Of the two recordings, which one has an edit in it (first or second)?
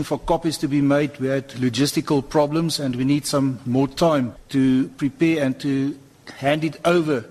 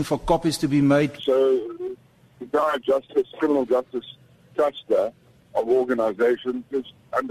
second